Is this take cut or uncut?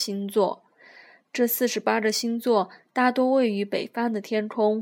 uncut